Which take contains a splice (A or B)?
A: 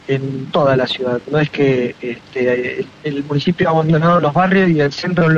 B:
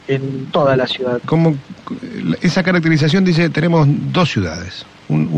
B